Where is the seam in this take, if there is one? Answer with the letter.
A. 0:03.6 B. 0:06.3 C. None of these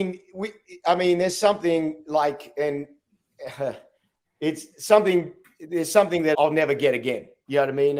B